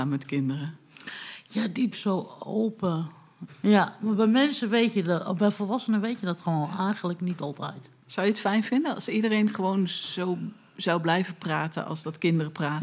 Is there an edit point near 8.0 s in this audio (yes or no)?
no